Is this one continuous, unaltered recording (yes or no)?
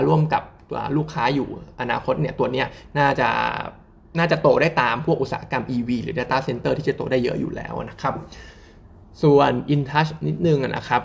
yes